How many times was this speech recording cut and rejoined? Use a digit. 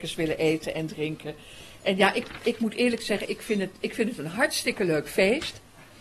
0